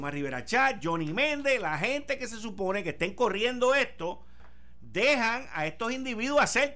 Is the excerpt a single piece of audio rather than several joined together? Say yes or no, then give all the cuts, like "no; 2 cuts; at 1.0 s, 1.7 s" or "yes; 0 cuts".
yes; 0 cuts